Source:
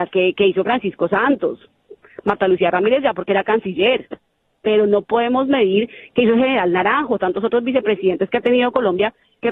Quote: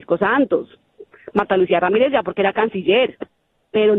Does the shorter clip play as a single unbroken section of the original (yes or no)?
yes